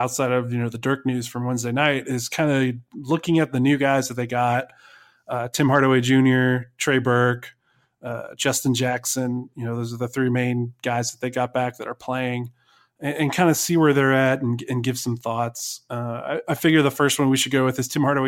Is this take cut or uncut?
uncut